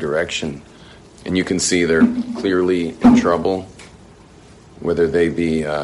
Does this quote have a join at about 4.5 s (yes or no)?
no